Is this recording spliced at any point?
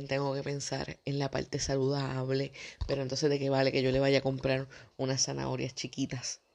no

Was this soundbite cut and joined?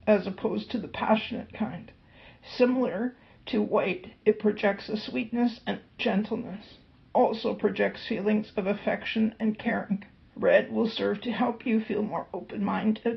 yes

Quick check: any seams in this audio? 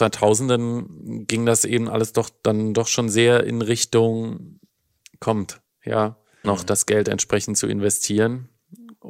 yes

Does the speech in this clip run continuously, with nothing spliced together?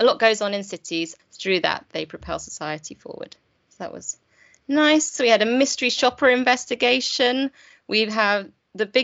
no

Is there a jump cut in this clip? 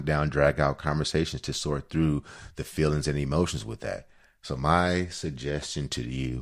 no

